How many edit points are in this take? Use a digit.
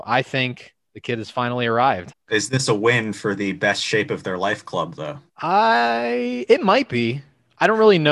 2